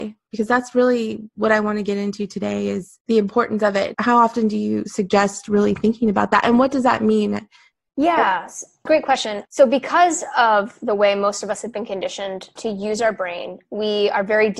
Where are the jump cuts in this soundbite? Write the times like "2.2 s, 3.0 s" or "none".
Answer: 3.9 s